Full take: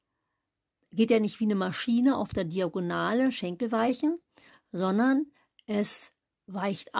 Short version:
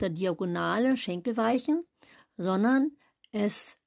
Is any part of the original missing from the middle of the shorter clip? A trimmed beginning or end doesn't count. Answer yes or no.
no